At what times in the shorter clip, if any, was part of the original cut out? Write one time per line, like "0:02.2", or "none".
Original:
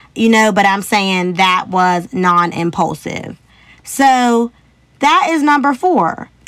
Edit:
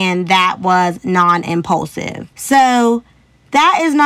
0:02.3